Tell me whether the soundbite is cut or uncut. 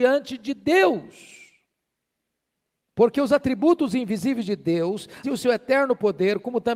cut